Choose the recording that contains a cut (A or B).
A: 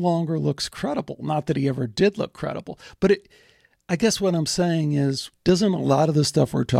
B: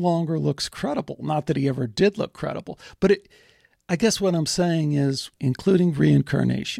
B